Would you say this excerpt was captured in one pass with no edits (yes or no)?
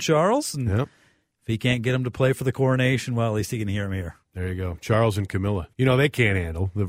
no